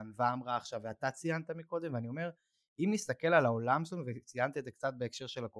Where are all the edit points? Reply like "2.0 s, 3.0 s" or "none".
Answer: none